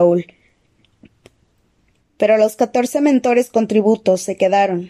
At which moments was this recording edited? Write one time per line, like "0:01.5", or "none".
0:02.0